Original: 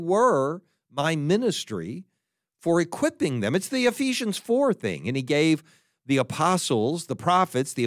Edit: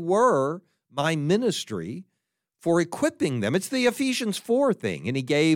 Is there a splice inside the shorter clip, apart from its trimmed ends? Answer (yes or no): no